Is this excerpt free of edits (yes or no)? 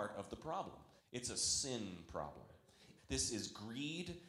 no